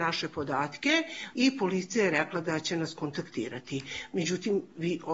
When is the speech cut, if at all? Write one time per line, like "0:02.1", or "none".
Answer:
none